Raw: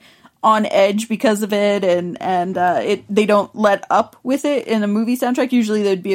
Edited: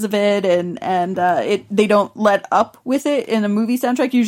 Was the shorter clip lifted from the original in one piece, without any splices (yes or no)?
yes